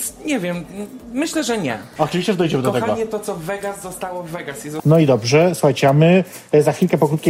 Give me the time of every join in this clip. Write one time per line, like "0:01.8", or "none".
0:02.0
0:04.8

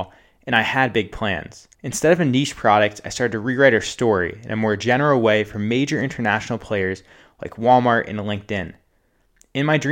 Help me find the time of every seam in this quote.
0:01.7

